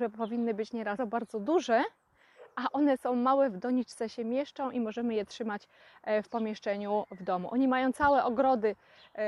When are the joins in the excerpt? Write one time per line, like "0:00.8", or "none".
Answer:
0:01.0